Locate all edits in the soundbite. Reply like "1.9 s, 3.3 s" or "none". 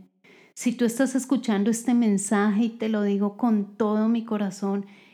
none